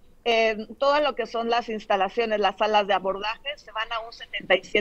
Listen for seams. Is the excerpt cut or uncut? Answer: uncut